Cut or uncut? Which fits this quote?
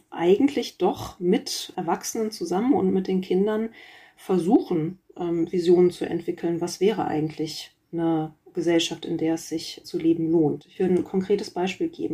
cut